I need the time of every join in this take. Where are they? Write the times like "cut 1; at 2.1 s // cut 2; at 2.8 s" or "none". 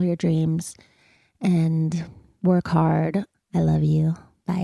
cut 1; at 3.3 s